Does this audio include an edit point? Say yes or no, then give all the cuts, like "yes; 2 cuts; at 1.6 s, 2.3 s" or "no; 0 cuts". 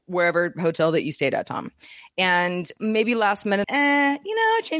yes; 1 cut; at 3.6 s